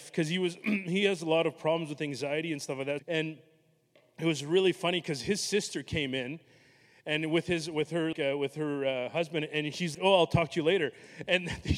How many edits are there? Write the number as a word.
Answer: three